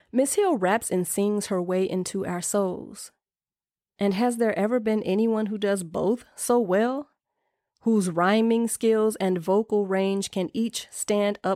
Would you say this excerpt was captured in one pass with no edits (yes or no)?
yes